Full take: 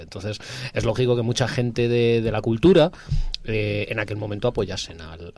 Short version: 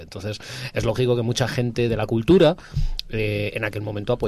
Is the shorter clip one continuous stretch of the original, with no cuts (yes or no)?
no